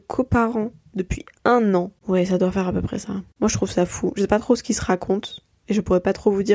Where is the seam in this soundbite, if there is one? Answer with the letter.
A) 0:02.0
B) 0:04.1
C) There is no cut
A